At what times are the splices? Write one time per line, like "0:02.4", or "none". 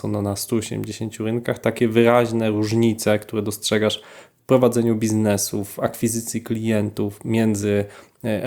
none